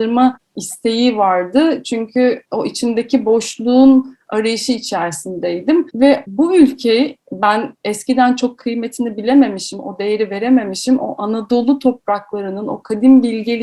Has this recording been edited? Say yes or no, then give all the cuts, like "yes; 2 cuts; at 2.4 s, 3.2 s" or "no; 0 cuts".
no; 0 cuts